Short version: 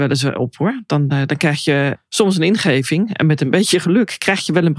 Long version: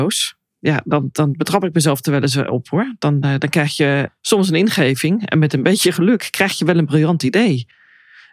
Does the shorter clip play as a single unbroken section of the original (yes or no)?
yes